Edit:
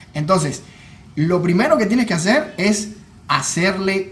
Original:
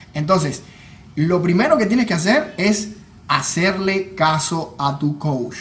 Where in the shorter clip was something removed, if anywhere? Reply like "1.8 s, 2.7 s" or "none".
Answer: none

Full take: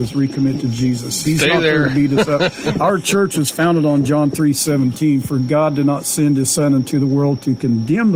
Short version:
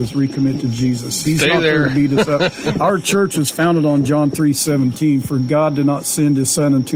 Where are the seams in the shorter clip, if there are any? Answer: none

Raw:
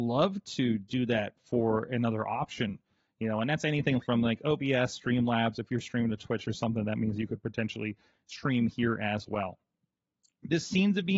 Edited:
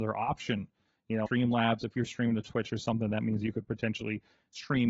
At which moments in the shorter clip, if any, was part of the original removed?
1.3 s

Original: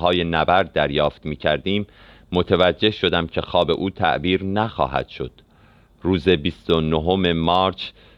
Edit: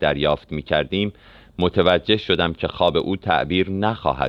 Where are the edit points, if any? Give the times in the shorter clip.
none

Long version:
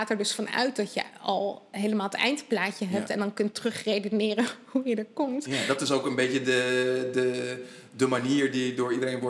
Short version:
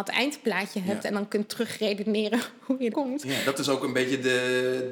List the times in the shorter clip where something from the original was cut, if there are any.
2.9 s

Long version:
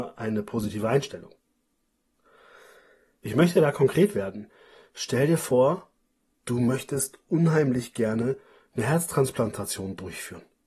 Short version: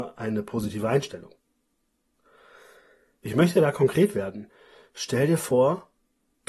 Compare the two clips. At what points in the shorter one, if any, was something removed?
none

